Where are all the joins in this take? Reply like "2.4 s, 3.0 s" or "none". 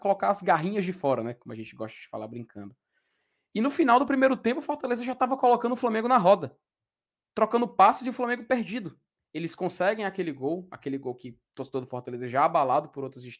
9.2 s